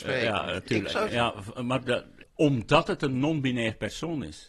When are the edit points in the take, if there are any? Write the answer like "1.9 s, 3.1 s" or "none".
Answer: 1.1 s, 2.2 s